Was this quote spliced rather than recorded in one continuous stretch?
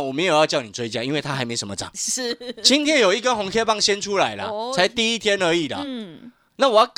no; 0 cuts

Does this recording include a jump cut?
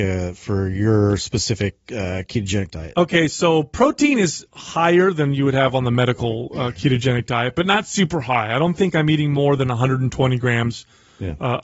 no; 0 cuts

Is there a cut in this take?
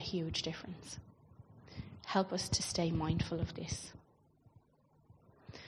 no; 0 cuts

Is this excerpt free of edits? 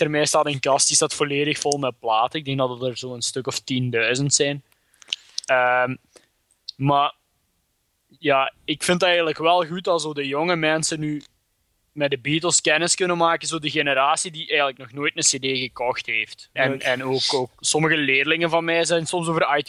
no; 2 cuts; at 16.6 s, 17.6 s

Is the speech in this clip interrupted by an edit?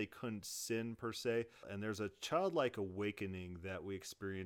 yes; 1 cut; at 1.6 s

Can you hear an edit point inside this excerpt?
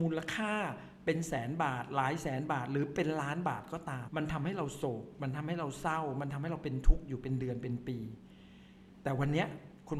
yes; 1 cut; at 4.1 s

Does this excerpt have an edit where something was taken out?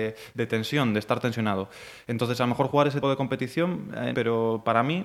yes; 2 cuts; at 3.0 s, 4.1 s

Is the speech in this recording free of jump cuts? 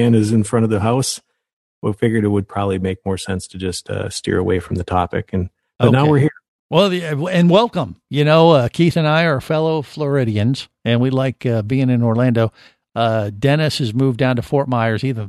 yes; 0 cuts

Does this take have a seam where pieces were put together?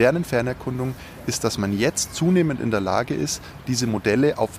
no; 0 cuts

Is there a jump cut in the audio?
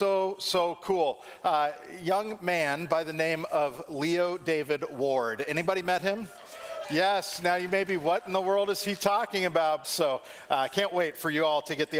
yes; 2 cuts; at 6.8 s, 9.8 s

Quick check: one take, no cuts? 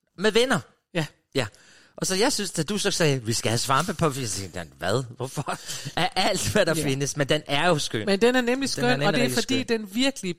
yes; 0 cuts

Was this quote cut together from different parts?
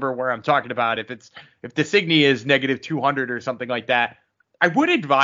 no; 0 cuts

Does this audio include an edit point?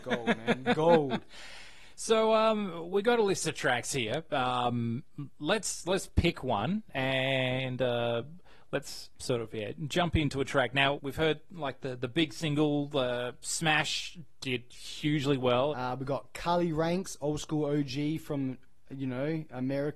yes; 2 cuts; at 11.0 s, 15.7 s

